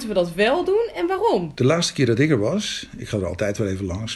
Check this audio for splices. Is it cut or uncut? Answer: cut